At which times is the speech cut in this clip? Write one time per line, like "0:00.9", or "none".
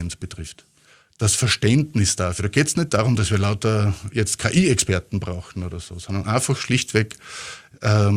none